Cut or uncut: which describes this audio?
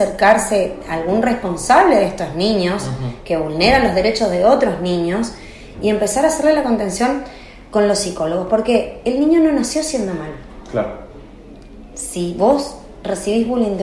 uncut